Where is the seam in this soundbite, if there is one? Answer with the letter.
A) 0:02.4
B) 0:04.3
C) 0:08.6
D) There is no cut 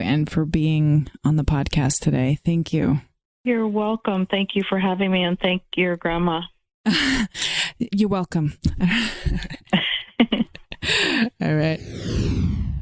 D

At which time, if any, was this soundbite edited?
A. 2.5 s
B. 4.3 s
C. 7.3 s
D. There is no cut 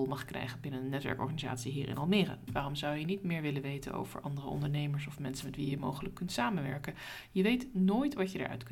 A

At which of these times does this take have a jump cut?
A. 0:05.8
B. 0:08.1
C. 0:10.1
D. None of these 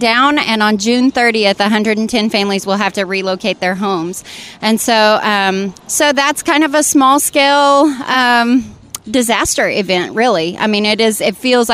D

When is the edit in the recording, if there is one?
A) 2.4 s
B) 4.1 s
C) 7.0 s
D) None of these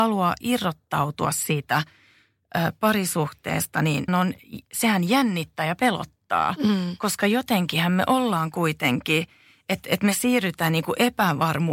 B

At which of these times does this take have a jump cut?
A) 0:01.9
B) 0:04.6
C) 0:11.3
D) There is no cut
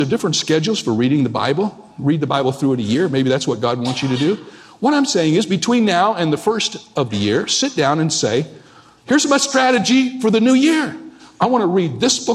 D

